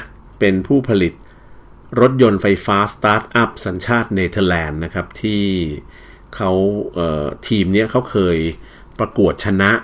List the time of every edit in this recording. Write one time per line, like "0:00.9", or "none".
none